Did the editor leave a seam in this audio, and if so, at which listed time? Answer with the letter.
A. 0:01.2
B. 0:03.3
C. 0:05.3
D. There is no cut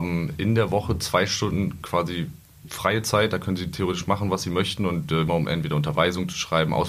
C